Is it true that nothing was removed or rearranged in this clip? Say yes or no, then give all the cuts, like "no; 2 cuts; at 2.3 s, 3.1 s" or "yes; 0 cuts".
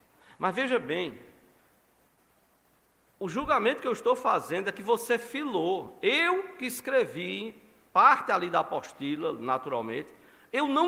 yes; 0 cuts